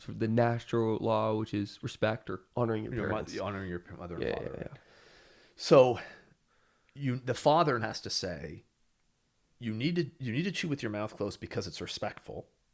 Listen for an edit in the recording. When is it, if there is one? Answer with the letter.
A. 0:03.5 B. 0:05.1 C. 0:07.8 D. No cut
C